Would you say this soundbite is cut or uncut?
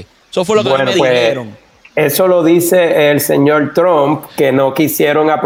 uncut